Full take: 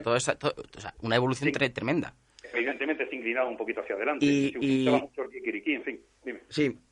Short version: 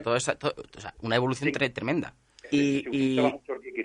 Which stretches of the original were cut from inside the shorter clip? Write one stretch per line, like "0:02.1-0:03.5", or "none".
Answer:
0:02.5-0:04.2